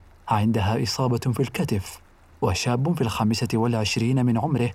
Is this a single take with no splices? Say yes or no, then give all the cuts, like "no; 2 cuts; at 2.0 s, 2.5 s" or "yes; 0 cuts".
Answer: yes; 0 cuts